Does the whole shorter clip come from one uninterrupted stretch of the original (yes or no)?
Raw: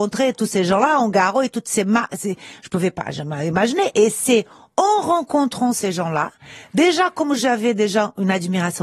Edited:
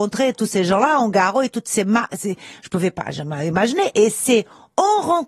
yes